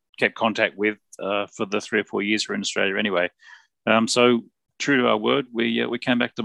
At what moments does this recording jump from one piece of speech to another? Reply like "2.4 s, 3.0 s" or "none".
none